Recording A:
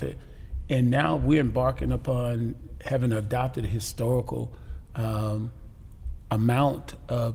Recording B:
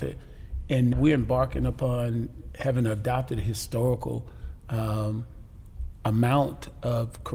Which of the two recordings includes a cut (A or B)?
B